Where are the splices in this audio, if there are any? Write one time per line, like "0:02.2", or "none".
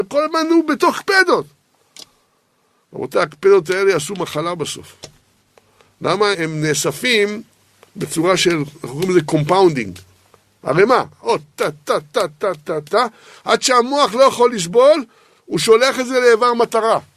0:06.3